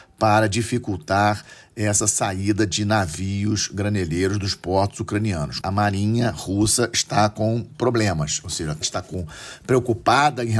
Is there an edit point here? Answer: yes; 2 cuts; at 5.6 s, 8.8 s

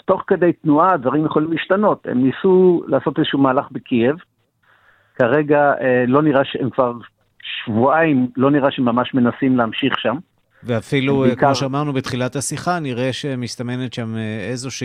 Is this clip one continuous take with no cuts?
yes; 0 cuts

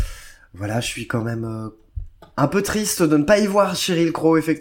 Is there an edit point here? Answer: no; 0 cuts

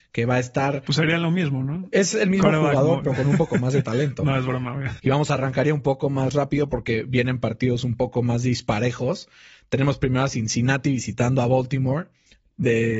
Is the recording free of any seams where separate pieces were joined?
no; 1 cut; at 5.0 s

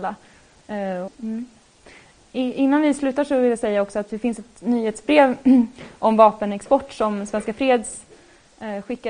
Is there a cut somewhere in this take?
yes; 1 cut; at 1.1 s

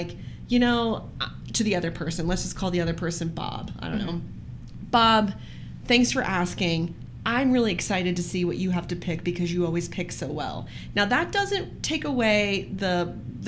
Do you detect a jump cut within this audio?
no; 0 cuts

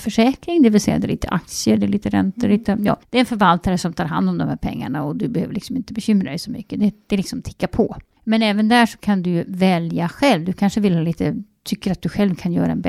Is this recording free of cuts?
no; 1 cut; at 1.8 s

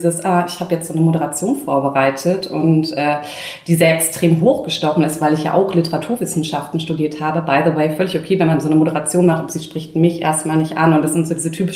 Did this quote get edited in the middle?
no; 0 cuts

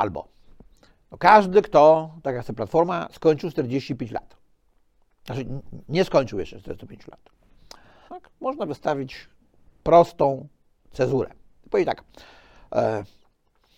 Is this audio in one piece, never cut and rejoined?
no; 1 cut; at 8.1 s

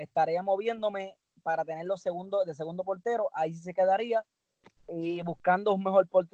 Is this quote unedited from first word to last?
yes; 0 cuts

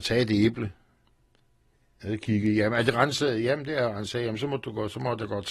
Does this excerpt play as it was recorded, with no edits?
yes; 0 cuts

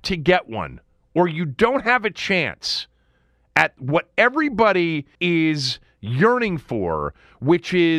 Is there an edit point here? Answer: yes; 1 cut; at 5.2 s

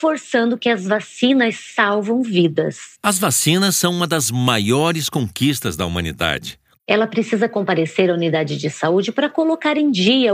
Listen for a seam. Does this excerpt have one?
yes; 2 cuts; at 3.0 s, 6.8 s

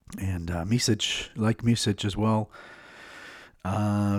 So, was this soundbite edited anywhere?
no; 0 cuts

